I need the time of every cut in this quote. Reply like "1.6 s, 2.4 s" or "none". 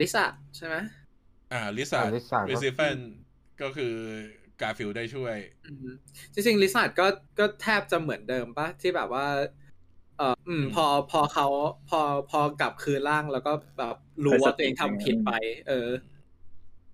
7.3 s, 10.3 s